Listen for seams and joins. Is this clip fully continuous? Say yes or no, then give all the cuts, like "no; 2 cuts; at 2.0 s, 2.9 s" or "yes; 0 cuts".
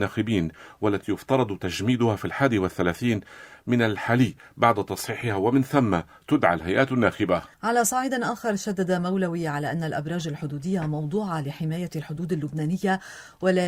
no; 1 cut; at 7.5 s